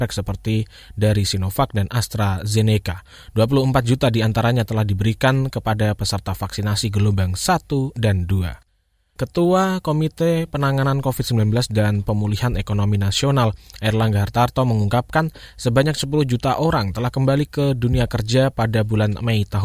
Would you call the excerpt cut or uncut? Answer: cut